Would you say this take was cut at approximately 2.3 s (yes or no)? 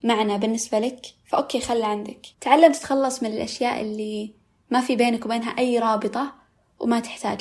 yes